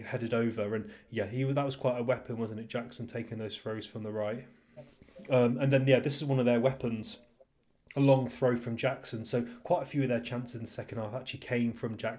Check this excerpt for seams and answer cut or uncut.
cut